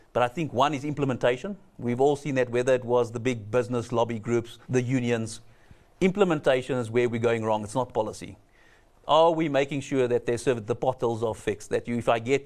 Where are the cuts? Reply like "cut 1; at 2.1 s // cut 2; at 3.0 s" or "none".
cut 1; at 4.6 s

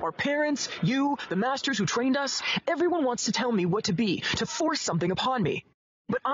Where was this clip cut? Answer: none

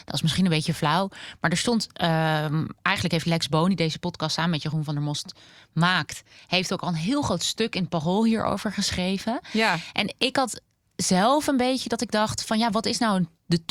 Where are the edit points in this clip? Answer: none

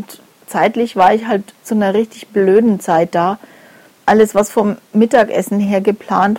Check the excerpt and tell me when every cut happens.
cut 1; at 1.6 s

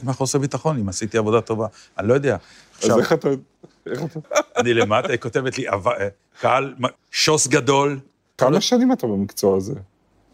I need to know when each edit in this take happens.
cut 1; at 4.2 s // cut 2; at 7.0 s // cut 3; at 8.4 s

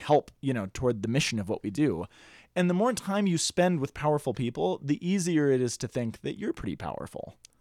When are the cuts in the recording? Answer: none

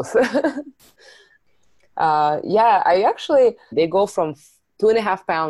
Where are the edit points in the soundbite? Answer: cut 1; at 3.7 s

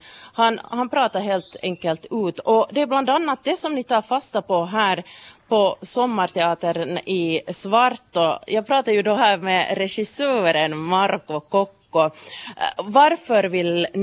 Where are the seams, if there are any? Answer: none

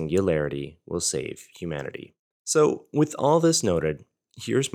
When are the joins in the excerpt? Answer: cut 1; at 2.3 s

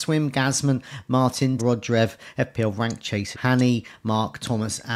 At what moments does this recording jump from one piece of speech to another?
cut 1; at 1.6 s // cut 2; at 3.3 s

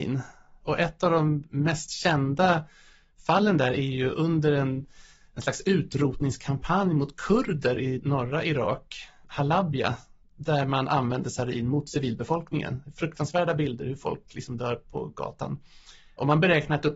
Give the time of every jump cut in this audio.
none

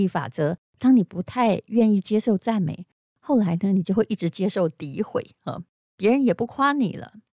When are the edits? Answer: none

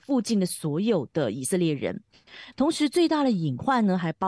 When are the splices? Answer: cut 1; at 2.5 s

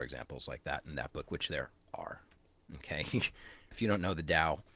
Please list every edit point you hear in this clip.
cut 1; at 3.7 s

